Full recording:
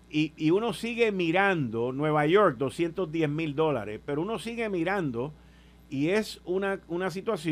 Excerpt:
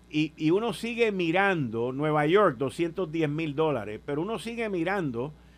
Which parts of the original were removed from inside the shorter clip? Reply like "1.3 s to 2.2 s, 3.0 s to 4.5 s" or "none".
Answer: none

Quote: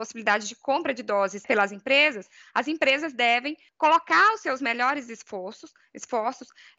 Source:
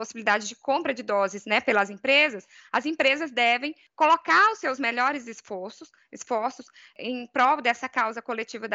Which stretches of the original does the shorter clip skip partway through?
1.4 s to 1.6 s

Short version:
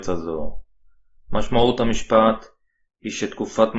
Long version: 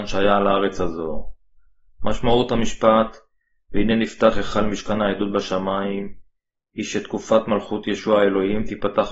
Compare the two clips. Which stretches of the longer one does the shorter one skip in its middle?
3.6 s to 6.6 s

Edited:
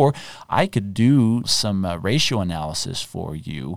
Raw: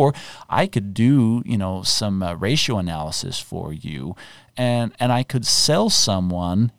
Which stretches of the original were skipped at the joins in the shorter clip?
1.4 s to 1.8 s

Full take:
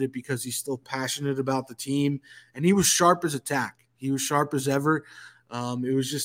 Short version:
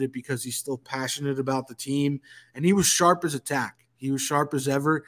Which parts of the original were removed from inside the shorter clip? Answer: none

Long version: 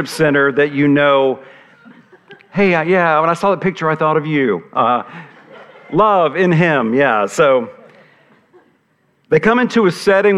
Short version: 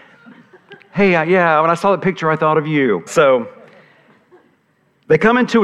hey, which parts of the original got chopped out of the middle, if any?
4.7 s to 7.3 s

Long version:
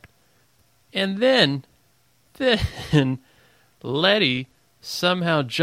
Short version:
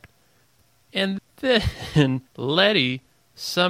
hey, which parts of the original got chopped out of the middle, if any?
1.2 s to 2.2 s, 3.2 s to 3.7 s

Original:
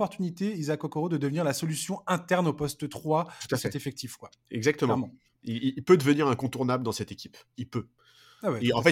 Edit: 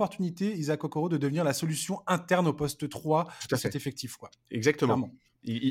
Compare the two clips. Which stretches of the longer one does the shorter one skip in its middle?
none

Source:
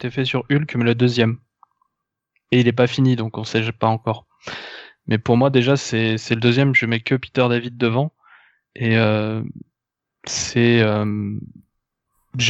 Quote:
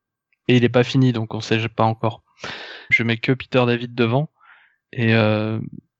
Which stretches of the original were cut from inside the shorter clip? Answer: 4.9 s to 6.7 s

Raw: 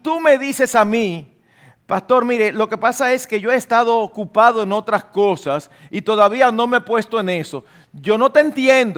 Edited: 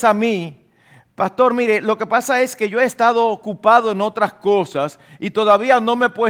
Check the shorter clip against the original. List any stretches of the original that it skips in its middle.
none

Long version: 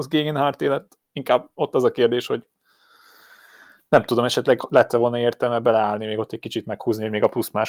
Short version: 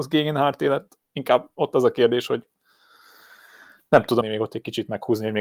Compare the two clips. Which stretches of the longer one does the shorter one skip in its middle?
4.2 s to 6.0 s

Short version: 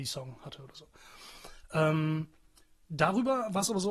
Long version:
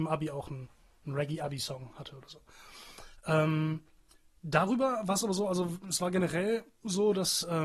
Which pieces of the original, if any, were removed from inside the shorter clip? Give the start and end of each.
none

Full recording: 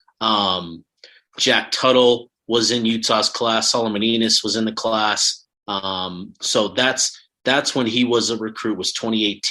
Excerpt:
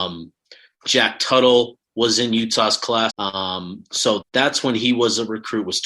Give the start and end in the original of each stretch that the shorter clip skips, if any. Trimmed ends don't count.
3.6 s to 5.6 s, 6.7 s to 7.3 s

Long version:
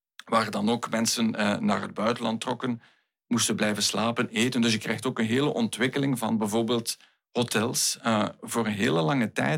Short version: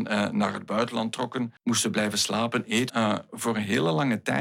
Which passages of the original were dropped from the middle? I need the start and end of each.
2.8 s to 3.2 s, 4.5 s to 8.0 s

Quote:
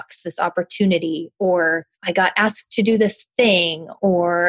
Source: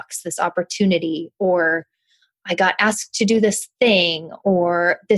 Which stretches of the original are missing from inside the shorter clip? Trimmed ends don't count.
1.9 s to 2.4 s

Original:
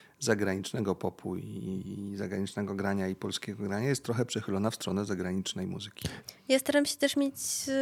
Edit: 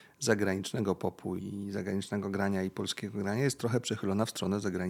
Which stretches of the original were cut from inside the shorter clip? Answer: 1.4 s to 1.8 s

